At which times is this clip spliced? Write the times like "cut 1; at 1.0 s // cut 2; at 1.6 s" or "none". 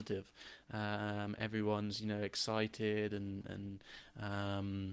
none